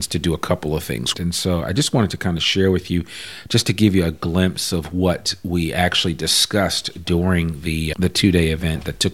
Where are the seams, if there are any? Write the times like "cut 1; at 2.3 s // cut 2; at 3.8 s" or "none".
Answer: cut 1; at 1.1 s // cut 2; at 7.9 s